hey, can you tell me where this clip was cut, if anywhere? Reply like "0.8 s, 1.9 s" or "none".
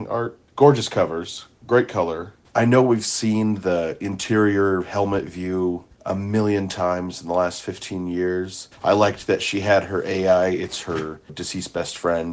8.7 s, 11.3 s